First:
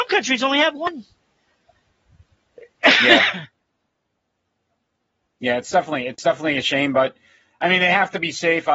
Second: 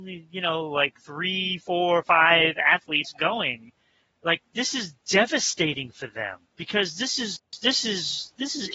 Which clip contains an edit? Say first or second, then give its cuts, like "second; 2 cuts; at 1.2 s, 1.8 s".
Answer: second; 1 cut; at 6.5 s